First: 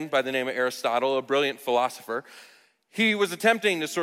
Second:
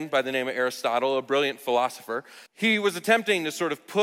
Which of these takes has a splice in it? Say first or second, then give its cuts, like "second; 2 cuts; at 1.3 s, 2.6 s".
second; 1 cut; at 2.5 s